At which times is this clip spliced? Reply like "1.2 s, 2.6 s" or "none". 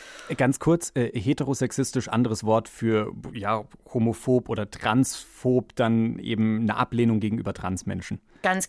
none